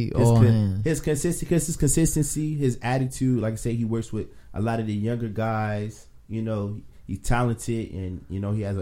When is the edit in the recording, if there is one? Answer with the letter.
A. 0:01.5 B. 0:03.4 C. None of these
C